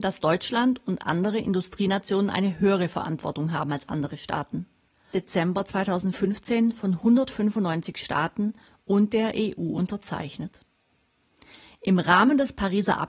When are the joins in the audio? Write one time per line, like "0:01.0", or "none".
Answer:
0:05.1

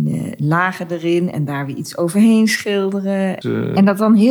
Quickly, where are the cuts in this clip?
0:03.4

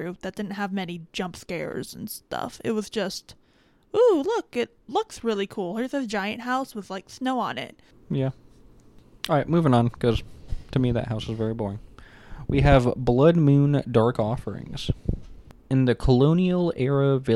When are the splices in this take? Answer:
none

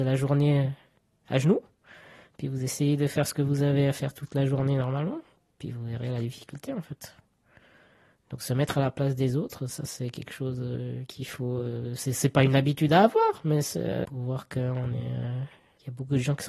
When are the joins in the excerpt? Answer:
0:14.0

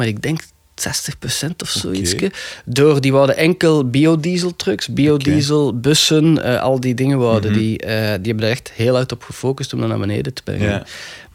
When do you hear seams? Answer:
none

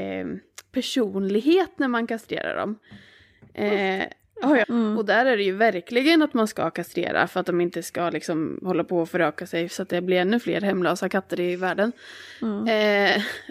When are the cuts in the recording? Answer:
0:04.6

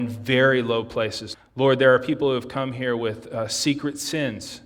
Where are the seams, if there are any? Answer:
0:01.3

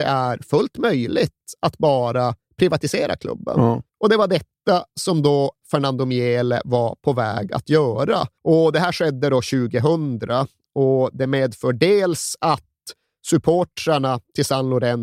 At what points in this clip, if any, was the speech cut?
0:03.9
0:08.4

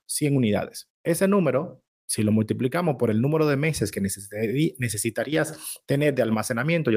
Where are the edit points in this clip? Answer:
0:00.9

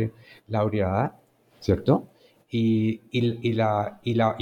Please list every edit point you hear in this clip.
none

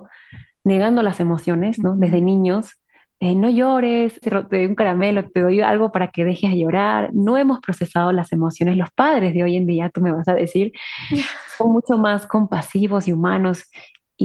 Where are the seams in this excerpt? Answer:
0:04.2
0:05.3

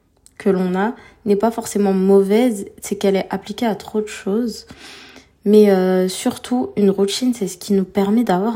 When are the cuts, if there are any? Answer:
none

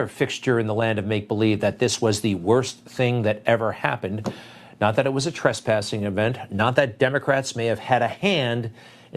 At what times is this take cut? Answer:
none

